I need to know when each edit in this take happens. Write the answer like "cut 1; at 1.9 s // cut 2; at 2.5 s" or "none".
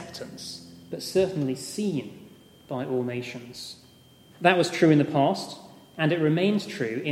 cut 1; at 4.3 s